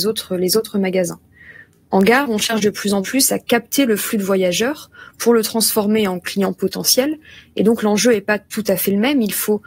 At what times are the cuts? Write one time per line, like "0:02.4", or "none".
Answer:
none

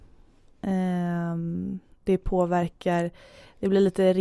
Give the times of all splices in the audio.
none

